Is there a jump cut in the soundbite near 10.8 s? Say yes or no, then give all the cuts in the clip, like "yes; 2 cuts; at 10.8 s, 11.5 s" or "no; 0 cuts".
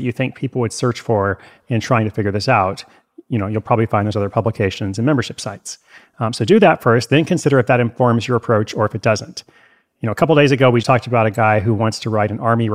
yes; 1 cut; at 10.8 s